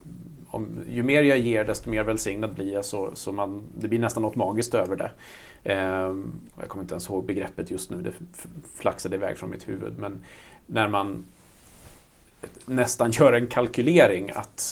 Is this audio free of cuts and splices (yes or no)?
no